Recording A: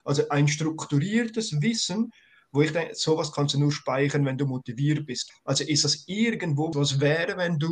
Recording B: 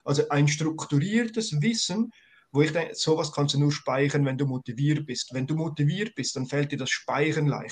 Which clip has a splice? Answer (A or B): A